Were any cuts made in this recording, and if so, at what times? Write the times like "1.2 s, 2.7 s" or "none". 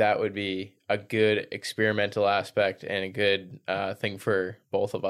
none